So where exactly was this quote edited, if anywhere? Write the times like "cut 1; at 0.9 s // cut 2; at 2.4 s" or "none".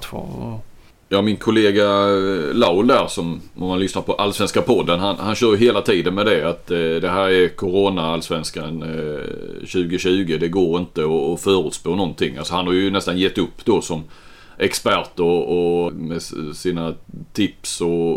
cut 1; at 15.9 s